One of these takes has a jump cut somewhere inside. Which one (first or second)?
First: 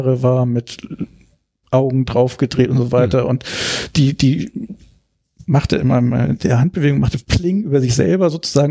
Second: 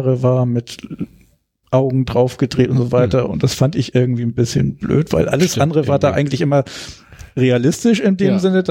second